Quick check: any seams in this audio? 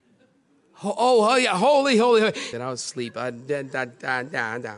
yes; 1 cut; at 2.5 s

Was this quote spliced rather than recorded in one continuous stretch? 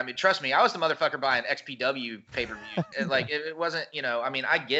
yes; 1 cut; at 2.9 s

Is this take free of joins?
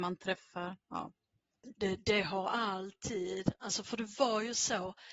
no; 1 cut; at 1.7 s

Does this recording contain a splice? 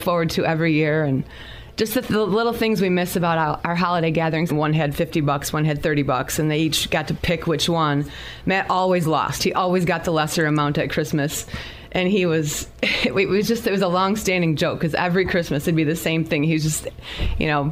yes; 1 cut; at 4.5 s

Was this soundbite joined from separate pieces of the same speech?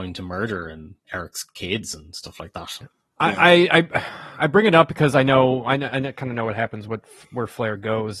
yes; 1 cut; at 2.8 s

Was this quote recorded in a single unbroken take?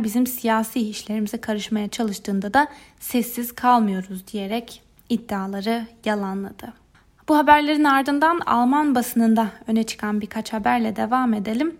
yes; 0 cuts

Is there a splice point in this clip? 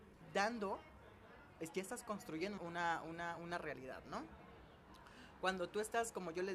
yes; 1 cut; at 2.6 s

